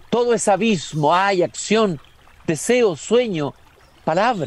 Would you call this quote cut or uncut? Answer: uncut